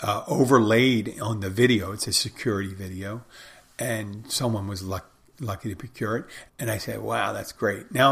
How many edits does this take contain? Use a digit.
1